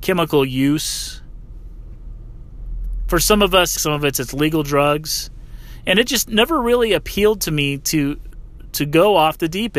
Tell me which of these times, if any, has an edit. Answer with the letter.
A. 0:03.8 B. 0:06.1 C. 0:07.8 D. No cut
A